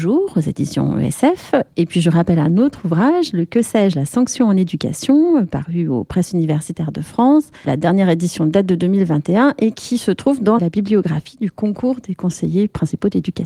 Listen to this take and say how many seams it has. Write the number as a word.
two